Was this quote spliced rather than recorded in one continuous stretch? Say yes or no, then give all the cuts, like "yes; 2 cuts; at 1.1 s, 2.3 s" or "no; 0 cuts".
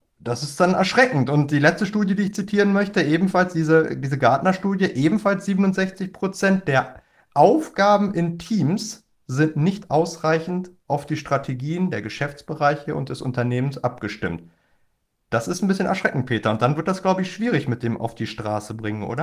no; 0 cuts